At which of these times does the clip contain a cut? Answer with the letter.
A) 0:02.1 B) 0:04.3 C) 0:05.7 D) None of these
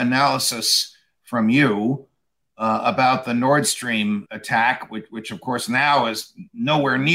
B